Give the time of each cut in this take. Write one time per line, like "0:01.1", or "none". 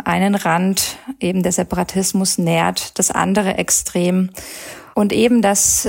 0:04.9